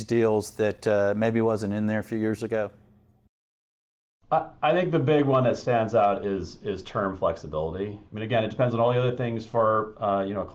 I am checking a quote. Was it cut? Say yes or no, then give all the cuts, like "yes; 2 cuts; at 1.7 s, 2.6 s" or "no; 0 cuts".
yes; 1 cut; at 8.1 s